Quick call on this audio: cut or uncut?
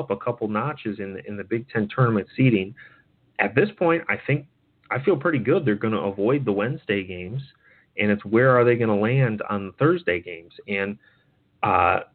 uncut